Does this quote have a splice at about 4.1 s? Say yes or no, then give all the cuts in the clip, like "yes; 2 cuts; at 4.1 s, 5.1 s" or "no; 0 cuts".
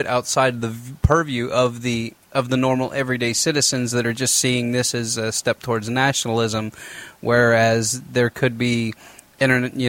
no; 1 cut; at 2.2 s